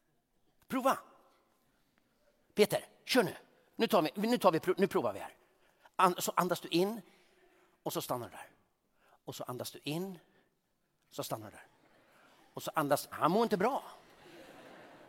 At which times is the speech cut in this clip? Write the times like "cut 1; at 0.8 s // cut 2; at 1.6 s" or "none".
cut 1; at 13.1 s